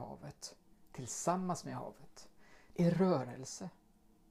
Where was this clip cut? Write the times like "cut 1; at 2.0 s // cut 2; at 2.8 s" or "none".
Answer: cut 1; at 2.7 s